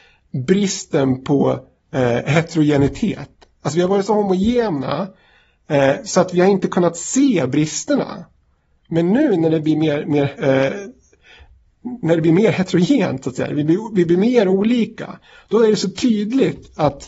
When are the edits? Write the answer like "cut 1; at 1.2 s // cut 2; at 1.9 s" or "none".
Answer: cut 1; at 10.4 s